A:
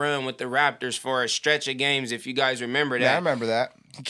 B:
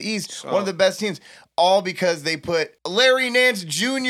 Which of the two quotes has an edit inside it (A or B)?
B